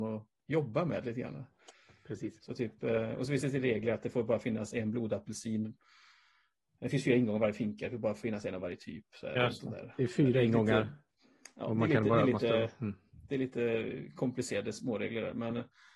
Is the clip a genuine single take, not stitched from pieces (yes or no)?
yes